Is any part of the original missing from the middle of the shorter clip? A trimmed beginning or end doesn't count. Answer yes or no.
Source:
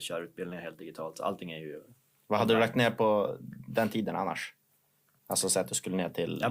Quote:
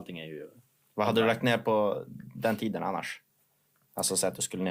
no